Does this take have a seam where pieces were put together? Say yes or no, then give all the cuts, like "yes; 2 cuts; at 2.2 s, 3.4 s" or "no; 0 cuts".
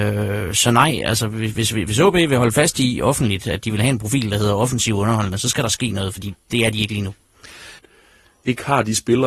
yes; 1 cut; at 7.8 s